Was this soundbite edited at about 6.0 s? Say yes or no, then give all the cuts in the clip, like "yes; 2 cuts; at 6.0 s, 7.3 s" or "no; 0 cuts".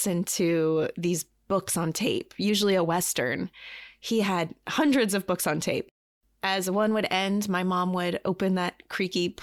no; 0 cuts